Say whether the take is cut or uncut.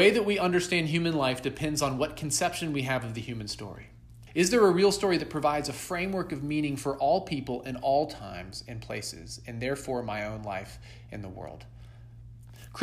cut